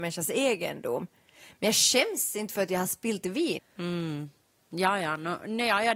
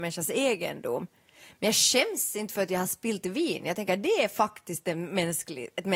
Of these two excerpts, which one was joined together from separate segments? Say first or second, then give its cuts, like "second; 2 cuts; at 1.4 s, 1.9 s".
first; 1 cut; at 3.6 s